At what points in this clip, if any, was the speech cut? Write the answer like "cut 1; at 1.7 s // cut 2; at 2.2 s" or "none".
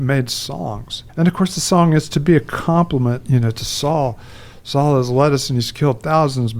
cut 1; at 1.1 s

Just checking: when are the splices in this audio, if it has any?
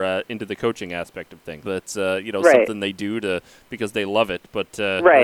cut 1; at 1.6 s

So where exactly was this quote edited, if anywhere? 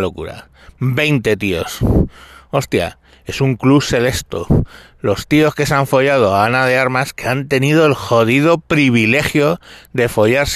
none

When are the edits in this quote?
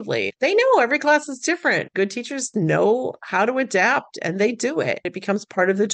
none

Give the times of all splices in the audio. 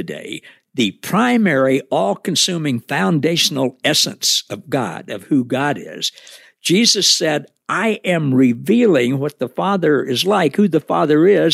none

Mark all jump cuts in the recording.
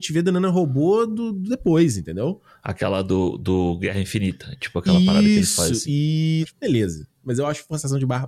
cut 1; at 6.4 s

